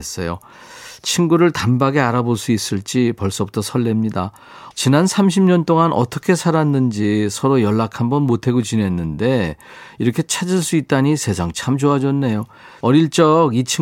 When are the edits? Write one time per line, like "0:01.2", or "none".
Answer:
0:04.7
0:12.8